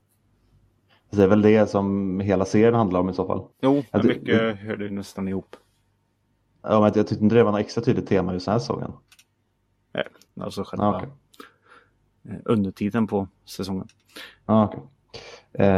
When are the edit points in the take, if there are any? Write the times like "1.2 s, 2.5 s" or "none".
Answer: 3.5 s, 10.3 s